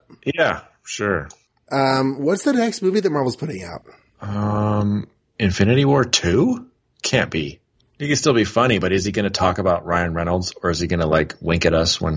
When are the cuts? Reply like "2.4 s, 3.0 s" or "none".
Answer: 7.8 s